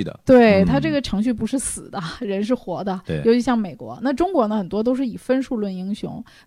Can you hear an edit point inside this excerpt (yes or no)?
no